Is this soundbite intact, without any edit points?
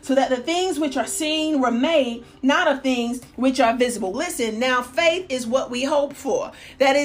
no; 1 cut; at 4.1 s

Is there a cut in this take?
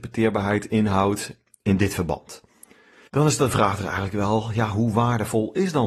yes; 1 cut; at 3.1 s

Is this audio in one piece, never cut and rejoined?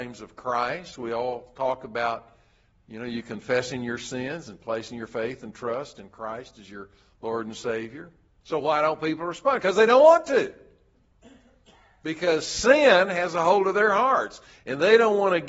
no; 1 cut; at 8.4 s

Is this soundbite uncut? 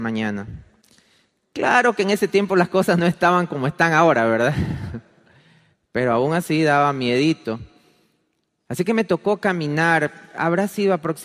yes; 0 cuts

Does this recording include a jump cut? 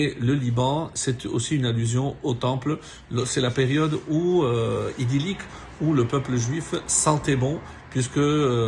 no; 0 cuts

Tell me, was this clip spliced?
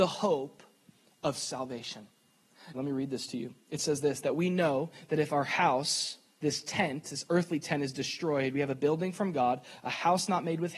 yes; 1 cut; at 2.7 s

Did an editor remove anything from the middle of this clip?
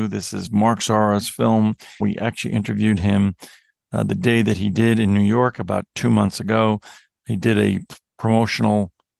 yes; 1 cut; at 2.0 s

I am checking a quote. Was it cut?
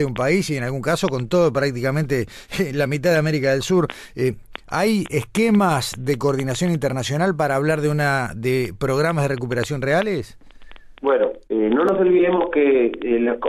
no; 0 cuts

